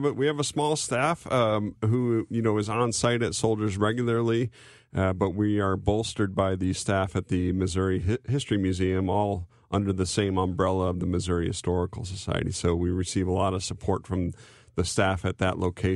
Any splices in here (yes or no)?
no